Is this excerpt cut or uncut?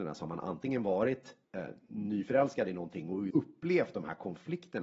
cut